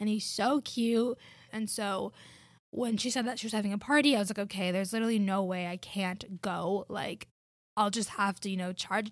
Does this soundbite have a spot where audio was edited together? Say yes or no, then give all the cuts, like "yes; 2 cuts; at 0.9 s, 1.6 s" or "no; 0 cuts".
yes; 1 cut; at 1.5 s